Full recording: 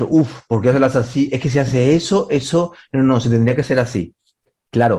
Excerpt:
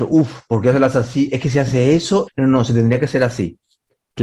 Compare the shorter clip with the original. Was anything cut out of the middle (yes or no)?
yes